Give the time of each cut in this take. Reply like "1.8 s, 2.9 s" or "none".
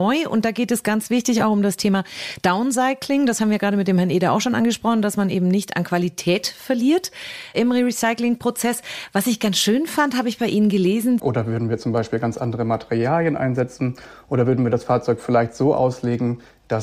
11.2 s

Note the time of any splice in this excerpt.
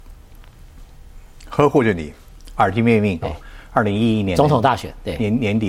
3.2 s

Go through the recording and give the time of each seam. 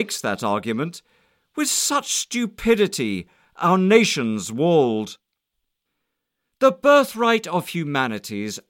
none

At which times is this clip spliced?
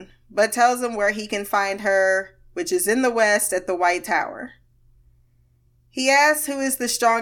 none

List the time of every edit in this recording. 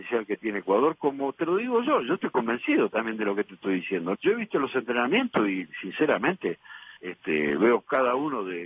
4.1 s, 7.0 s

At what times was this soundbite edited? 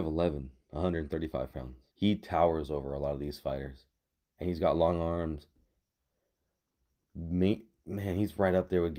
1.9 s

